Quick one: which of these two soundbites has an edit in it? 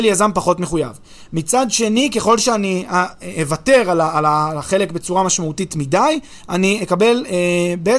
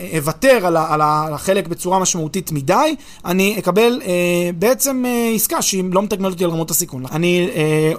second; 1 cut; at 7.1 s

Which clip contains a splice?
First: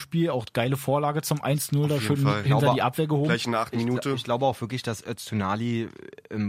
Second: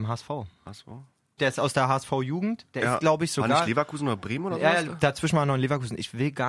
second; 1 cut; at 1.4 s

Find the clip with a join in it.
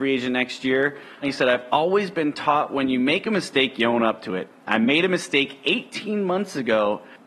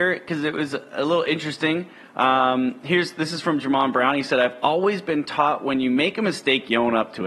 first; 1 cut; at 1.2 s

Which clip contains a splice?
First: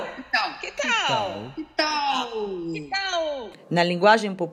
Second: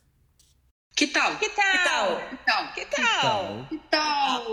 first; 1 cut; at 3.5 s

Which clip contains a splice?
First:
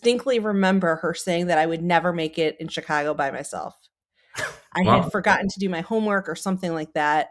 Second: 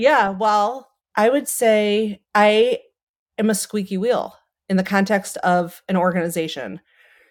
second; 2 cuts; at 1.0 s, 2.2 s

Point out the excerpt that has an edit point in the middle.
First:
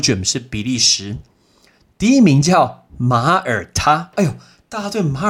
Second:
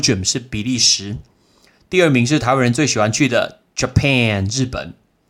first; 1 cut; at 1.9 s

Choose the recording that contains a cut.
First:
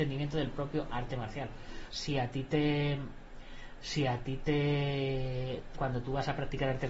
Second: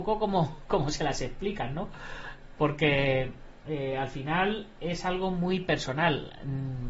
first; 2 cuts; at 1.9 s, 5.7 s

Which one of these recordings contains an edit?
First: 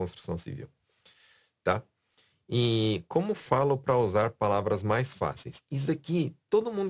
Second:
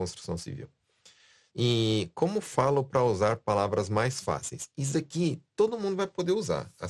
second; 1 cut; at 1.5 s

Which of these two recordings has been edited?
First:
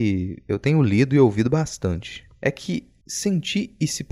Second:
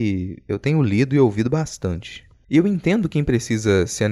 second; 1 cut; at 2.3 s

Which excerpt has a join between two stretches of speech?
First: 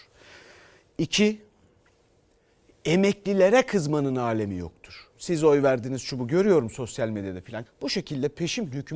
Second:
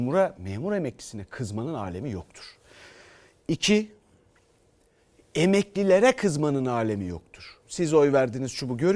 first; 1 cut; at 7.7 s

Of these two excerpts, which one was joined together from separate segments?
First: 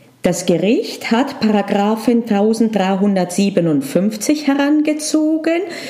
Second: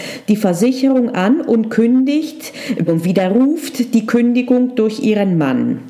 second; 1 cut; at 2.9 s

